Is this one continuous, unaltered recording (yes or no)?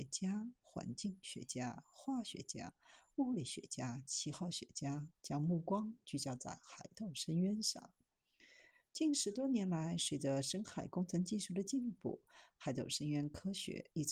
yes